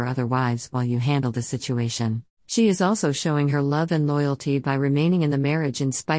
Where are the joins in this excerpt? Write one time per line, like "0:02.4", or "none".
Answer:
0:02.4